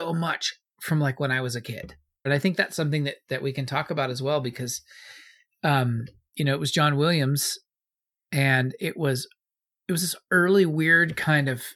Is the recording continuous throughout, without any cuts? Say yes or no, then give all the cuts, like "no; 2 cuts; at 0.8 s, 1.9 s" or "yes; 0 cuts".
no; 1 cut; at 2.3 s